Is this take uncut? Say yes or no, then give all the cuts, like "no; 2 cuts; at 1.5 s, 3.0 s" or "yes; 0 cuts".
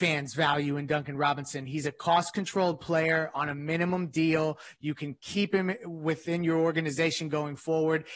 yes; 0 cuts